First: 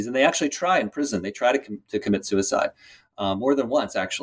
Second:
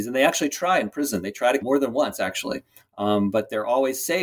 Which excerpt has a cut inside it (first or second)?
second